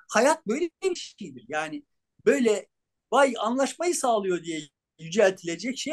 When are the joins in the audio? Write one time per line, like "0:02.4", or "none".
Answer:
none